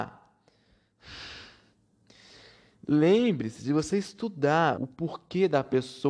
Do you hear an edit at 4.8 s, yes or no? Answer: yes